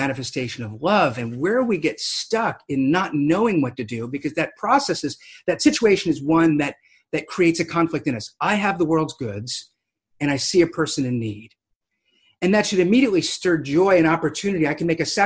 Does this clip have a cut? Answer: no; 0 cuts

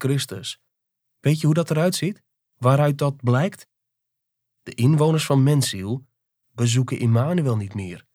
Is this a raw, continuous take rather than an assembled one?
no; 1 cut; at 1.0 s

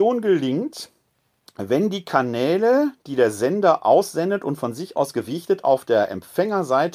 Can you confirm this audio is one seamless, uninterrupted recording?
yes; 0 cuts

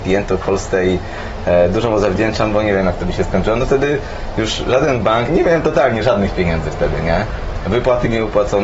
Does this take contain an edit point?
yes; 1 cut; at 5.3 s

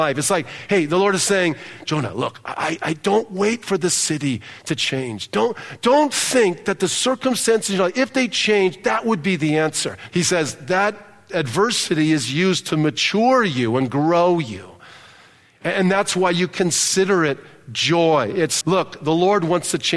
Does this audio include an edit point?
yes; 2 cuts; at 10.1 s, 18.6 s

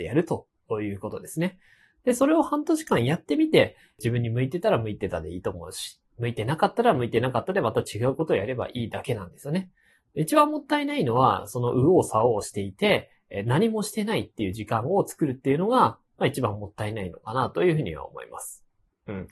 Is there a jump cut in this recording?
no; 0 cuts

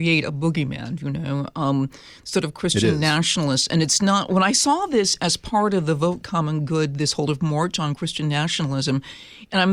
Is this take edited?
no; 0 cuts

